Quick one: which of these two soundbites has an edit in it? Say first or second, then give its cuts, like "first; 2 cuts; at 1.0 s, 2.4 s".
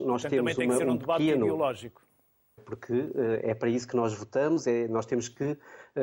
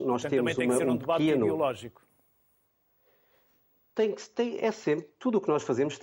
first; 1 cut; at 2.6 s